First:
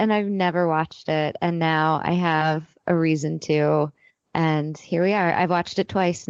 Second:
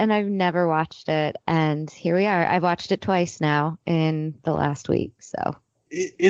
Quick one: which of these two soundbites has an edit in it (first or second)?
second